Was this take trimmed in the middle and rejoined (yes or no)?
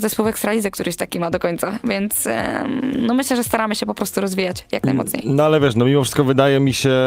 no